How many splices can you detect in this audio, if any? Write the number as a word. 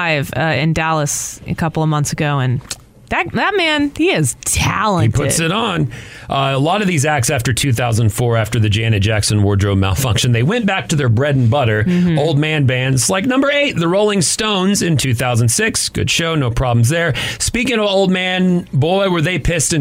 zero